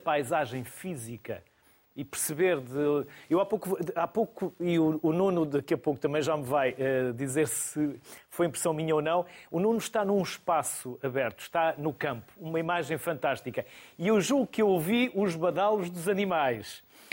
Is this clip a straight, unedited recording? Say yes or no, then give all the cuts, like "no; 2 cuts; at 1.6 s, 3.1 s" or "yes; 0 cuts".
yes; 0 cuts